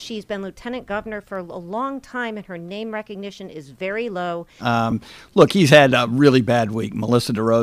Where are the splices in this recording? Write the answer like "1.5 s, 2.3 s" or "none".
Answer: 4.6 s